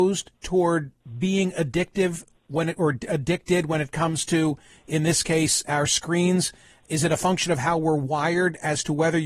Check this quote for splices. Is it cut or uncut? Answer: uncut